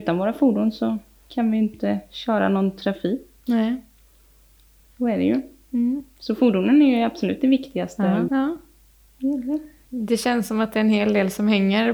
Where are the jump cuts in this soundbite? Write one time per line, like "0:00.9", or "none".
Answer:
0:08.3